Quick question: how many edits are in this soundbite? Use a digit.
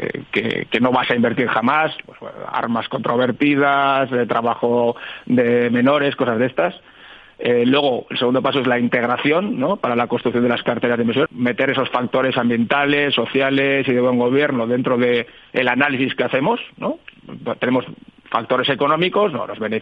1